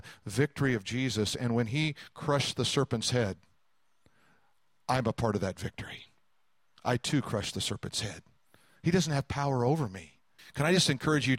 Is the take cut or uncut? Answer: cut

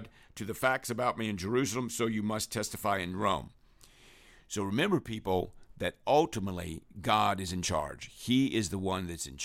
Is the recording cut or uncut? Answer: uncut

